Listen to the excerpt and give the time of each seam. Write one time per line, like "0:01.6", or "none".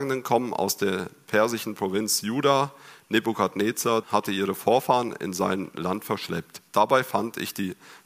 0:04.0
0:06.7